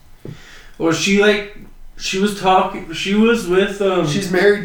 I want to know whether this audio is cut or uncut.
uncut